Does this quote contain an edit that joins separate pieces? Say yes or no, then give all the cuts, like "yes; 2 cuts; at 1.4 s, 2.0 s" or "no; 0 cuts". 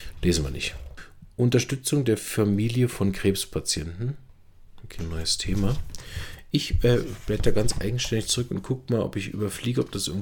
yes; 1 cut; at 5.0 s